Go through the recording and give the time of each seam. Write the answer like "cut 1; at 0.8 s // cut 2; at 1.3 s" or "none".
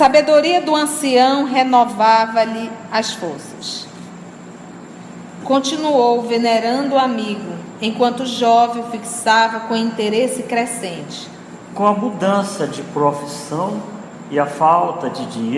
cut 1; at 5.4 s